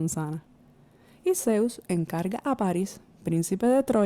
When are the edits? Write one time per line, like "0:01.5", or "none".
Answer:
none